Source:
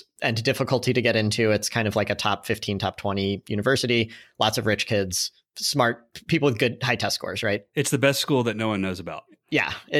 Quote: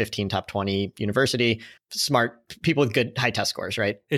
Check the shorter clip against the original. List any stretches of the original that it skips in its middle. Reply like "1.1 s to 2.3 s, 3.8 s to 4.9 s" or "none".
4.3 s to 5.4 s